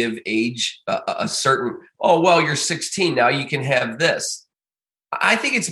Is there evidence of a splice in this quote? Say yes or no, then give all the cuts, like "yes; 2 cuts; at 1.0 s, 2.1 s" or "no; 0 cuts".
no; 0 cuts